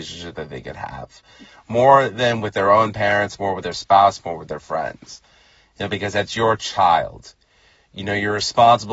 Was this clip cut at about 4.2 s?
yes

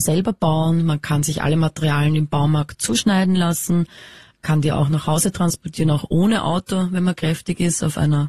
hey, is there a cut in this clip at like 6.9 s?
no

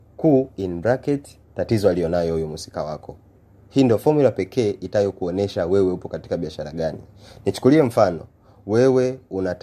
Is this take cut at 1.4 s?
yes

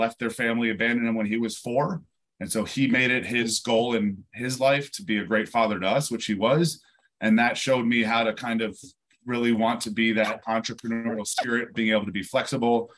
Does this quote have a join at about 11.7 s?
yes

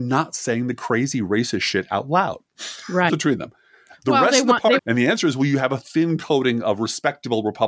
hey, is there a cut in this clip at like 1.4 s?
no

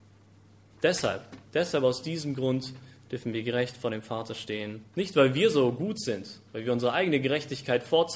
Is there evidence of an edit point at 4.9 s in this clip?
yes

